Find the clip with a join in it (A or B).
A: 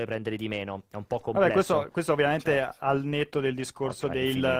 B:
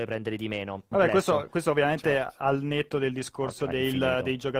B